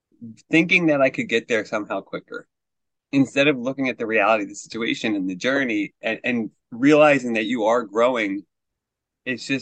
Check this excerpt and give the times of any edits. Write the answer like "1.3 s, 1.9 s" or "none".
none